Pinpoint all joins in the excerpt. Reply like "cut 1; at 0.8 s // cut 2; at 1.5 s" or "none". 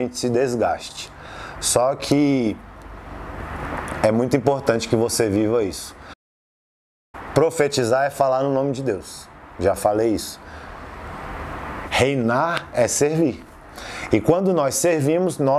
cut 1; at 11.8 s